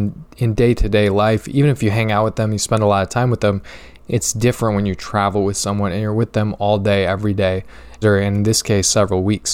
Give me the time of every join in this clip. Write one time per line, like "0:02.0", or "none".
0:08.0